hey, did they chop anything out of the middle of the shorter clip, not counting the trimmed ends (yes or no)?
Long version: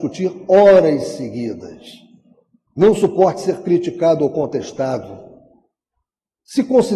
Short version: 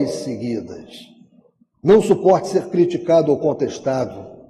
no